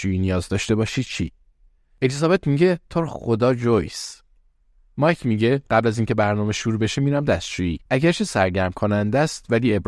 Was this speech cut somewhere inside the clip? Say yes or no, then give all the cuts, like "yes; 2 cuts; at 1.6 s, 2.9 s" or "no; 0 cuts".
yes; 1 cut; at 7.9 s